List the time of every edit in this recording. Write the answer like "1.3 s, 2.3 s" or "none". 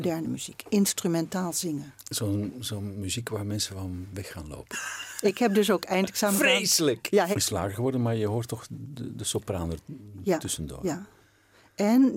4.7 s, 7.3 s